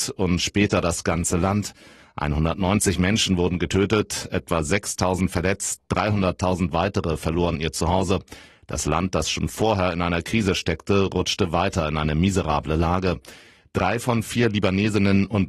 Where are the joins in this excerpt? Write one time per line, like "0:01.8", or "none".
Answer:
none